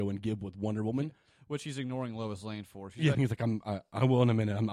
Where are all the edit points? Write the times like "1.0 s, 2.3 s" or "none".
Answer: 3.1 s